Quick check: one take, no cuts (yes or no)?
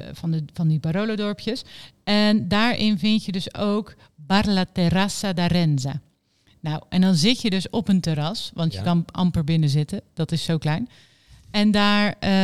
yes